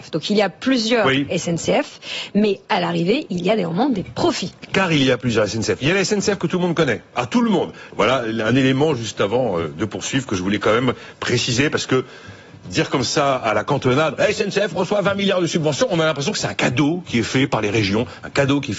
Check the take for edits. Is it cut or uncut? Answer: cut